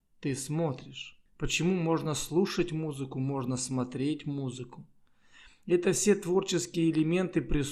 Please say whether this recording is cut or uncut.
cut